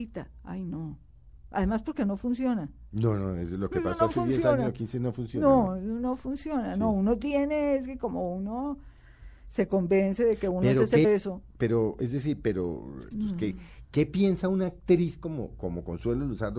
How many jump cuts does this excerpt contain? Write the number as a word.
two